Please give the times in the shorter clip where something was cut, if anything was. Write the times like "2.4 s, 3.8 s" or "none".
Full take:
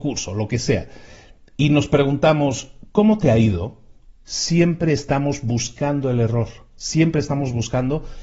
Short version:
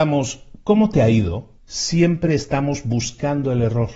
1.6 s